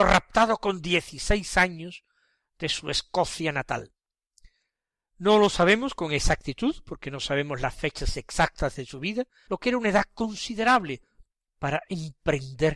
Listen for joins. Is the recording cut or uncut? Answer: cut